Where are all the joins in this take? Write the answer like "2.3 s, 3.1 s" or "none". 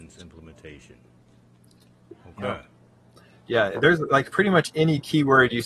none